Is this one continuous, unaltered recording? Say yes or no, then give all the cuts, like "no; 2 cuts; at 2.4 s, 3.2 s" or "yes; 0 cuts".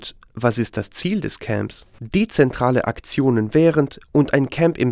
no; 1 cut; at 1.9 s